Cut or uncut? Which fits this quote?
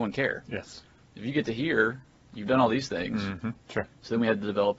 cut